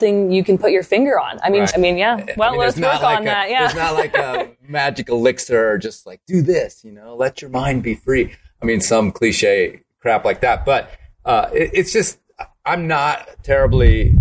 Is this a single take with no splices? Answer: no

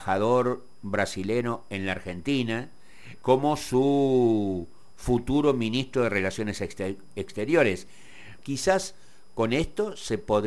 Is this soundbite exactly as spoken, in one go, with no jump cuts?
no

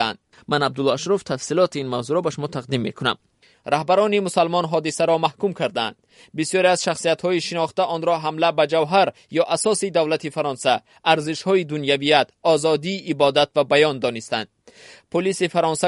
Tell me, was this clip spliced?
no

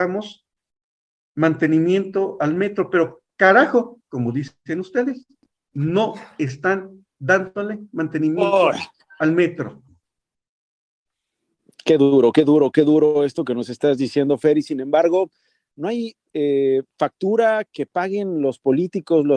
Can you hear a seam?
no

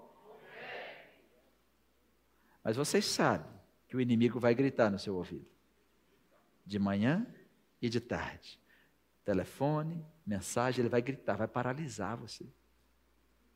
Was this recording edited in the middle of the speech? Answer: no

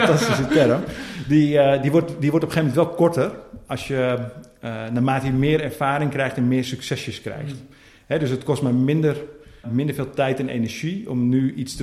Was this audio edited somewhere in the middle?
yes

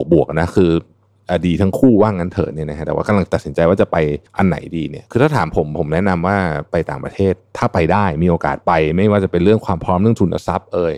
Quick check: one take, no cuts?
no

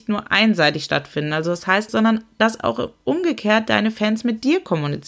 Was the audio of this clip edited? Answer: yes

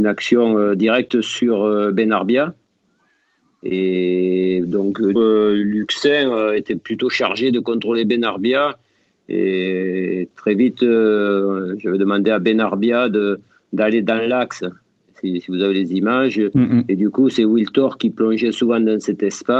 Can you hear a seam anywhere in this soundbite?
yes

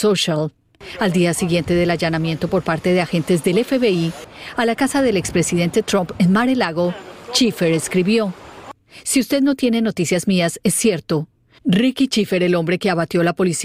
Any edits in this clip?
yes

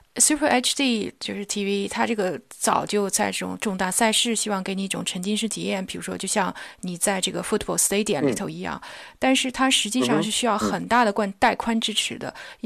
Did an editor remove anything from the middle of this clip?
no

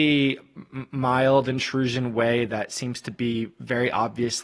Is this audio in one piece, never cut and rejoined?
yes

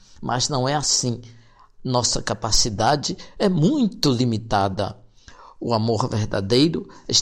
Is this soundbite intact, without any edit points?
yes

